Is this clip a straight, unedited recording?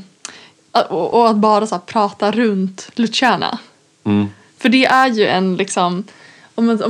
yes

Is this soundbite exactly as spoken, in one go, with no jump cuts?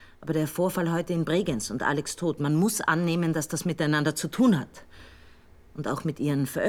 yes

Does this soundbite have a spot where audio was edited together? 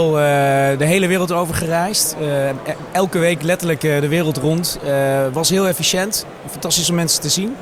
no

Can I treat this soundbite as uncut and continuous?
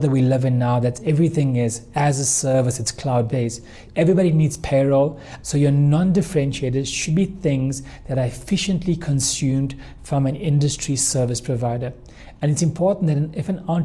no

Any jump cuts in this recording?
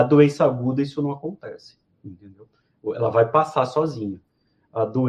no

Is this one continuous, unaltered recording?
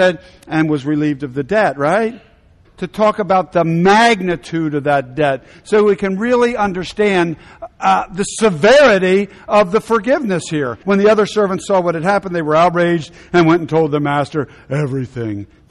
no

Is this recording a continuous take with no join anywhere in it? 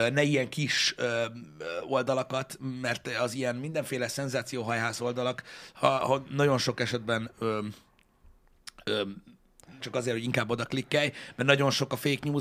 no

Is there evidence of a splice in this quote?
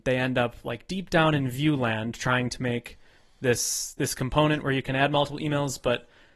no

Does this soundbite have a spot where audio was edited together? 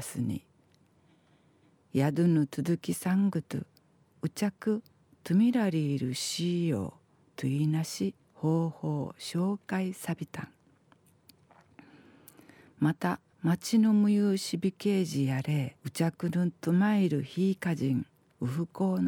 yes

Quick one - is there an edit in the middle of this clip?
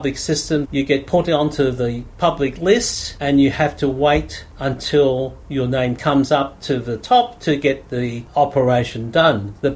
no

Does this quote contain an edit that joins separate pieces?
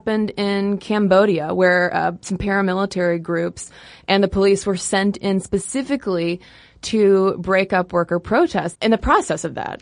yes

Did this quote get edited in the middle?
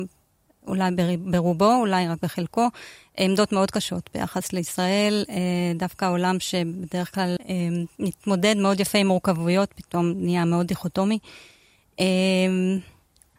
yes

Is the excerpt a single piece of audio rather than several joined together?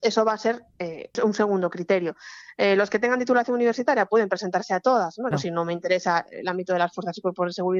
no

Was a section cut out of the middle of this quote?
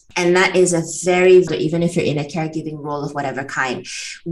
yes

